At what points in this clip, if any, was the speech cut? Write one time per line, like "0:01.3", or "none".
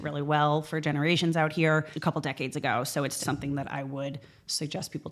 0:01.9
0:03.2